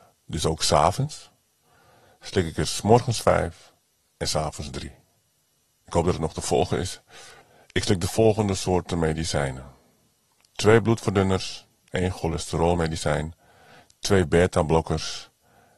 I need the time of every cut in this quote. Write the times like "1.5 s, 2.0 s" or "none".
none